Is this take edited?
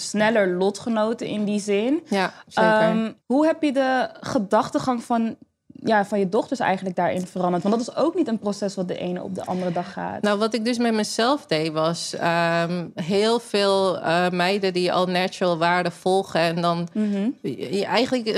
yes; 1 cut; at 3.2 s

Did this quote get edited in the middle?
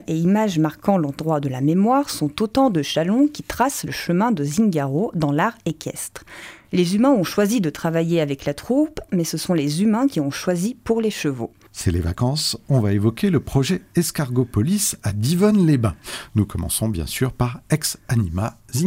yes; 2 cuts; at 6.6 s, 11.7 s

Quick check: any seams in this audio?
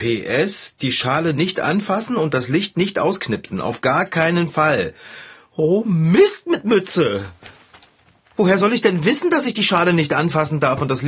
no; 0 cuts

